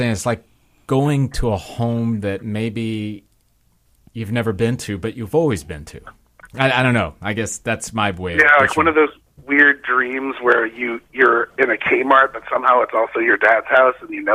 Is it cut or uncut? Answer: uncut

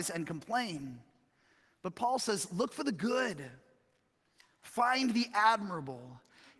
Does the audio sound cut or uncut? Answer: uncut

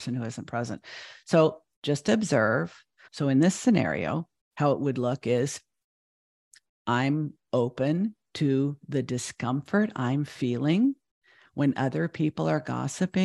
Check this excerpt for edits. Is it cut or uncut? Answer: cut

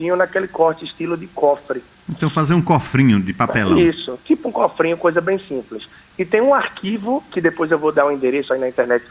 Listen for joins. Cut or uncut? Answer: uncut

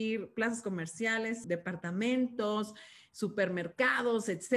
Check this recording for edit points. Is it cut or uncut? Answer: cut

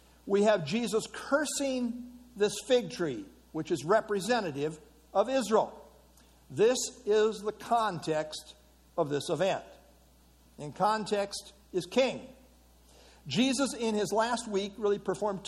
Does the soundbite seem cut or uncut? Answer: uncut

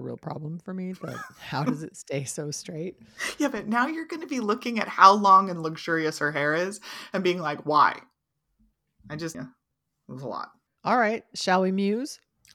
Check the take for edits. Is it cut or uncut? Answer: cut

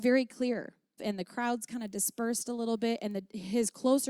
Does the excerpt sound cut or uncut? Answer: cut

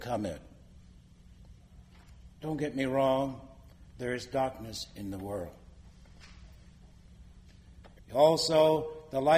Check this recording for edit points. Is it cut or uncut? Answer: cut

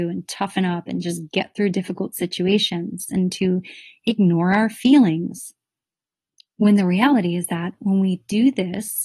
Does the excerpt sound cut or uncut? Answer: uncut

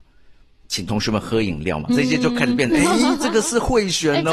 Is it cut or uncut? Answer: uncut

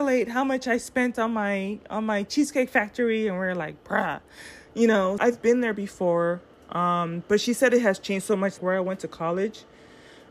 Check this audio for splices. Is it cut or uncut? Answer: cut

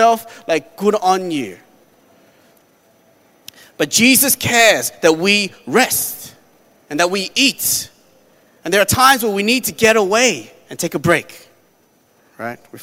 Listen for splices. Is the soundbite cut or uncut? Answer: uncut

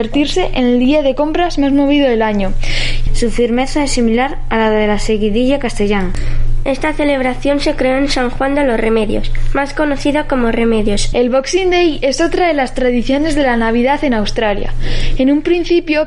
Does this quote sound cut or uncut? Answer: cut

